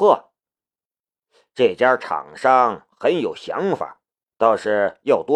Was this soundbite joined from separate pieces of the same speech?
no; 0 cuts

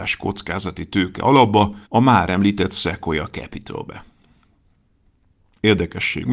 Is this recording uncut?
no; 1 cut; at 1.9 s

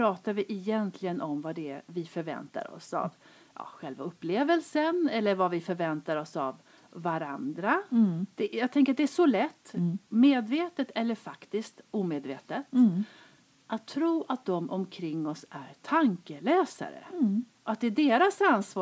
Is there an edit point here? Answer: yes; 1 cut; at 8.3 s

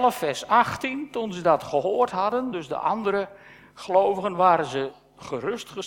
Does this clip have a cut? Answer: no; 0 cuts

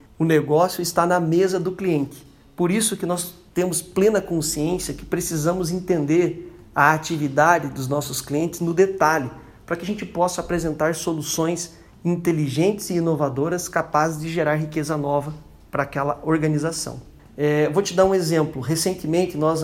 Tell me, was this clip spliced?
no; 0 cuts

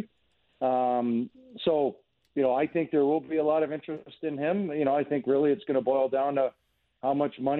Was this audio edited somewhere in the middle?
no; 0 cuts

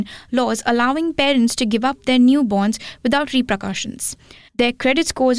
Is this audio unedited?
no; 1 cut; at 4.5 s

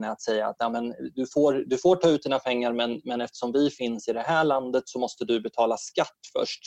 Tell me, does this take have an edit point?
yes; 1 cut; at 1.1 s

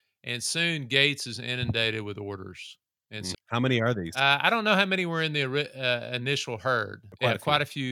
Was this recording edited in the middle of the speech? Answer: yes; 1 cut; at 3.3 s

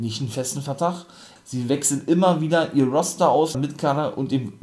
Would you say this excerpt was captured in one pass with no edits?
no; 2 cuts; at 1.4 s, 3.5 s

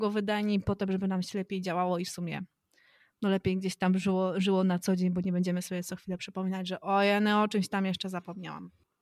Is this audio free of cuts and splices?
yes; 0 cuts

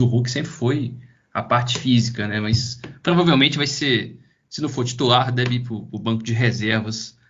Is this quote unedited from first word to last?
yes; 0 cuts

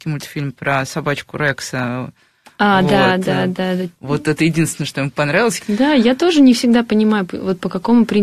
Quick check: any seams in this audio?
yes; 1 cut; at 5.6 s

